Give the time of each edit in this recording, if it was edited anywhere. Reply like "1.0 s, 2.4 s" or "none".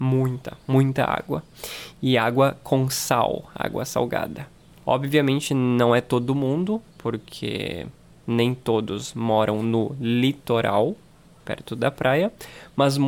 4.8 s, 6.9 s